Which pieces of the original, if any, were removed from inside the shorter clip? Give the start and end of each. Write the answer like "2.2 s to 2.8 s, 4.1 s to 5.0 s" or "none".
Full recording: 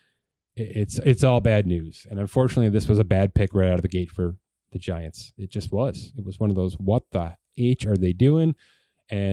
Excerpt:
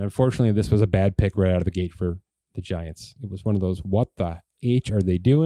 5.3 s to 6.1 s